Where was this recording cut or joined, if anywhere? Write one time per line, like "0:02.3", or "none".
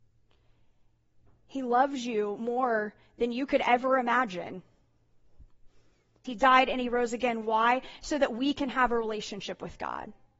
0:06.2